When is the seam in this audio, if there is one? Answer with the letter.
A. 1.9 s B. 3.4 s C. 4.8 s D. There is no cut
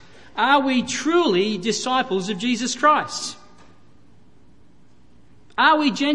D